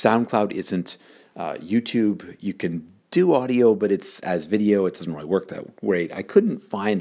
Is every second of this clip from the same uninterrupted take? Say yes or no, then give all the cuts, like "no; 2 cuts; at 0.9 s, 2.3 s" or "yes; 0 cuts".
yes; 0 cuts